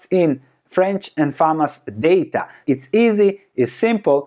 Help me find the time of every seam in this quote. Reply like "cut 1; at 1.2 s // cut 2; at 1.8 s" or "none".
cut 1; at 2.6 s